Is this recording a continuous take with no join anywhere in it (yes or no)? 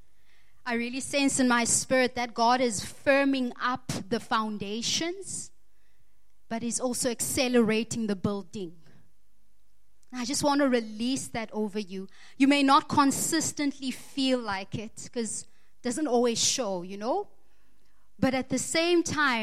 yes